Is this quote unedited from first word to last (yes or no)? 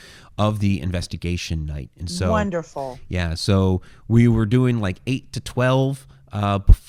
yes